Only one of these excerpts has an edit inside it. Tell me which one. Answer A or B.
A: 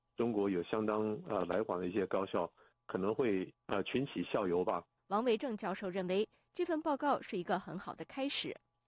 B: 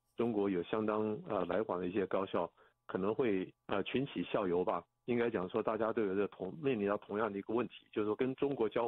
A